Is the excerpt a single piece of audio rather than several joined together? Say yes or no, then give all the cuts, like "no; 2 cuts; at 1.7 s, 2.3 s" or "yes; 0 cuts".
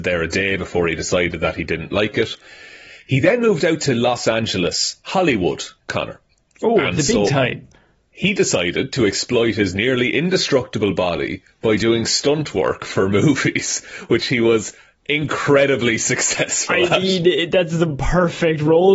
yes; 0 cuts